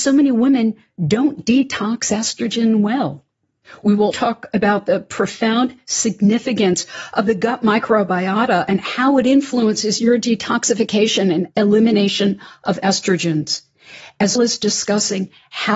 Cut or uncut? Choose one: cut